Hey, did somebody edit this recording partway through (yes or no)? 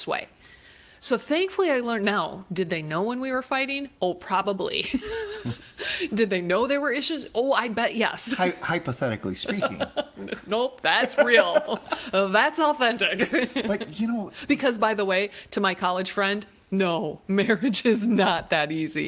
no